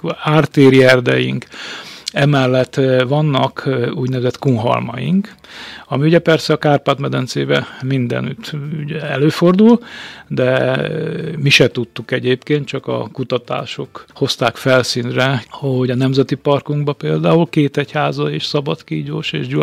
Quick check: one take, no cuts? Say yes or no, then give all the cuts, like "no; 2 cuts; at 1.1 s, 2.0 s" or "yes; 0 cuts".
no; 2 cuts; at 14.1 s, 15.4 s